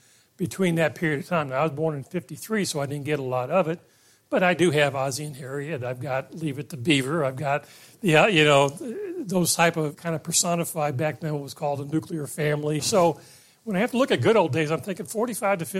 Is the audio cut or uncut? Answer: cut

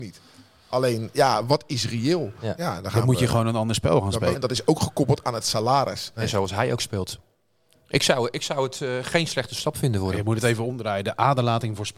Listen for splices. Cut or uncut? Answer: cut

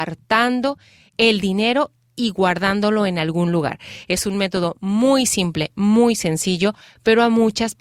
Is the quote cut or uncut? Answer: uncut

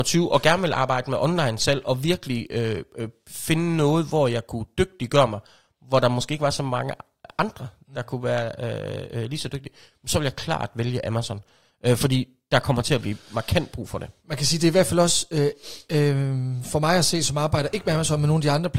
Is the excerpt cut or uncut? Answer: uncut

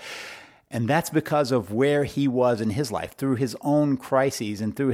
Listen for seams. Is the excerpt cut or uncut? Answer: uncut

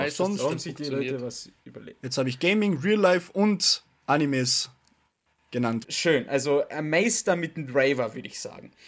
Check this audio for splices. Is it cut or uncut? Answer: cut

